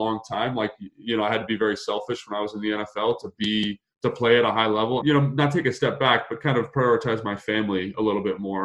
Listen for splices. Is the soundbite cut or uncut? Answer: cut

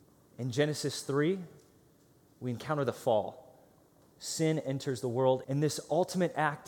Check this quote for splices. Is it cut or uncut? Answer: cut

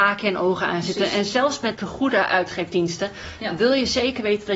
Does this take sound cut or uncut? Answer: cut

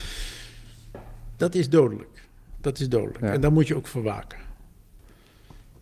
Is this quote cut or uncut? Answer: cut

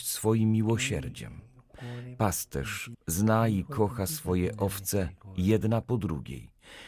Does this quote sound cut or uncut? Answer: cut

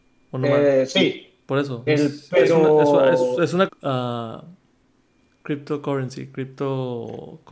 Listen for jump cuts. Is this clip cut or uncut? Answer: cut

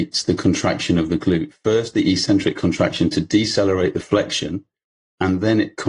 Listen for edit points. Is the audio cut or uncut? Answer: uncut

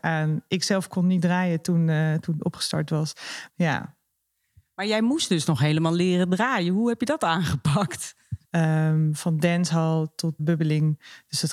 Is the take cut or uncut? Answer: cut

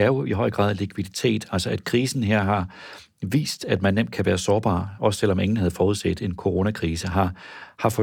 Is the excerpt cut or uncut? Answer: uncut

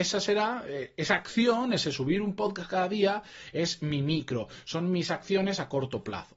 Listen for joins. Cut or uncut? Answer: uncut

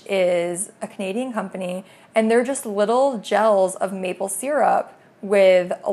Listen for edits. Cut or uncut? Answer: uncut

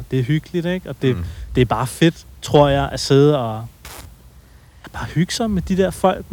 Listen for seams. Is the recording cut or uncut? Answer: uncut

